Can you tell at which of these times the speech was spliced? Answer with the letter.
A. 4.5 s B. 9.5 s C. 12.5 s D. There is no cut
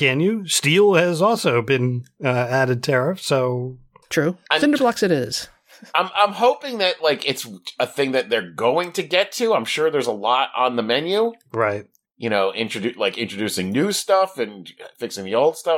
A